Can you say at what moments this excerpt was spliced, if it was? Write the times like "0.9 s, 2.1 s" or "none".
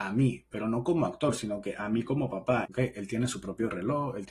2.7 s